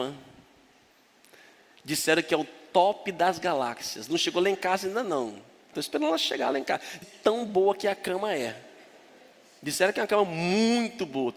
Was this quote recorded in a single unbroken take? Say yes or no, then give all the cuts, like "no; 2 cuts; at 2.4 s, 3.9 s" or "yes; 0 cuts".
no; 2 cuts; at 5.7 s, 7.0 s